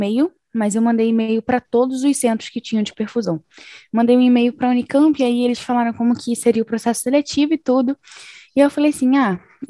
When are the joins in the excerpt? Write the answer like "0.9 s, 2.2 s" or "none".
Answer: none